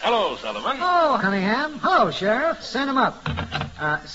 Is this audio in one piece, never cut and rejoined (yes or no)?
no